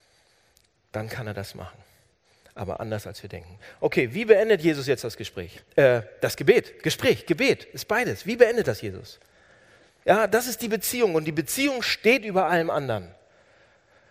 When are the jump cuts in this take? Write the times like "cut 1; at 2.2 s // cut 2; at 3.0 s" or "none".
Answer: cut 1; at 10.0 s